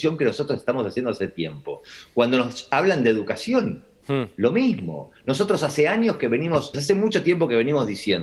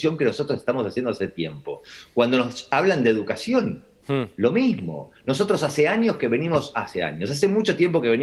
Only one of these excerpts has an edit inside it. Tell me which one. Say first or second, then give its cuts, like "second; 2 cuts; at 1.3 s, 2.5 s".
first; 1 cut; at 6.7 s